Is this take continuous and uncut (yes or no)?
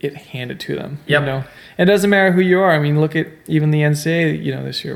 yes